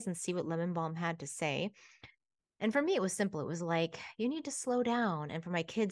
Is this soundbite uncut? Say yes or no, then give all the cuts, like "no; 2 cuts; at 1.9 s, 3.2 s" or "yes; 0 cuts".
yes; 0 cuts